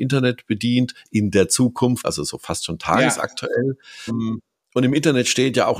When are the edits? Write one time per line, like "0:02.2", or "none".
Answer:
0:02.0
0:04.1